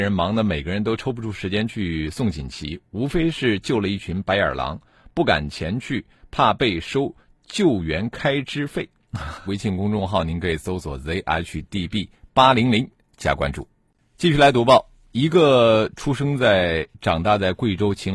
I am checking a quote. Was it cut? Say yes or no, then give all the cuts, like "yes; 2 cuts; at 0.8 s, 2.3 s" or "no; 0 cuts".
yes; 1 cut; at 9.5 s